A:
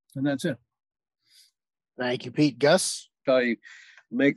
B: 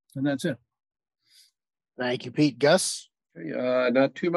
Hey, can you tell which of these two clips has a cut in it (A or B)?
A